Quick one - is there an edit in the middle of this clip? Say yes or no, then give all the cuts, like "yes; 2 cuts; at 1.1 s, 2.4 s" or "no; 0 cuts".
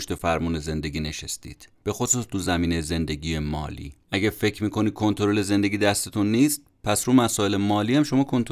yes; 2 cuts; at 1.7 s, 4.0 s